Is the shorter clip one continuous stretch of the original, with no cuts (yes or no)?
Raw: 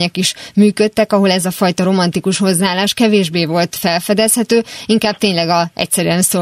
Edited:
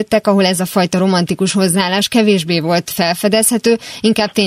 yes